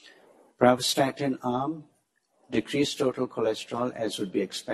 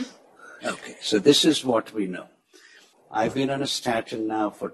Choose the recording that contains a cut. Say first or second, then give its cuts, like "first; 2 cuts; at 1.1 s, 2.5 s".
second; 1 cut; at 2.9 s